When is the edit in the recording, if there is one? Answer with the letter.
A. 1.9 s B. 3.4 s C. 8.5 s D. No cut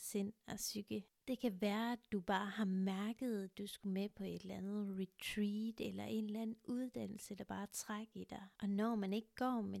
C